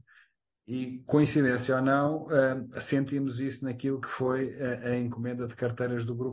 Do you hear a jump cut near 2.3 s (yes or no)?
no